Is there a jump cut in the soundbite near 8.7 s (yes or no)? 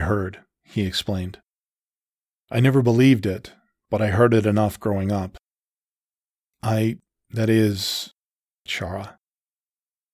yes